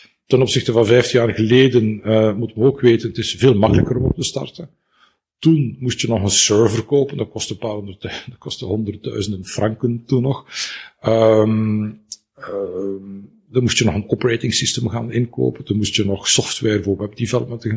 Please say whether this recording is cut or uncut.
uncut